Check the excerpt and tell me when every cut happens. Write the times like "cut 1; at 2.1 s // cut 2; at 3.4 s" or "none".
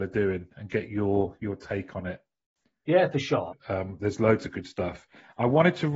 cut 1; at 3.5 s